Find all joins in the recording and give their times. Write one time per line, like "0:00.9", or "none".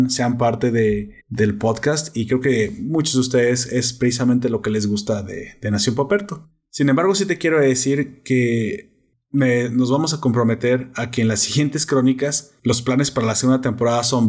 0:01.2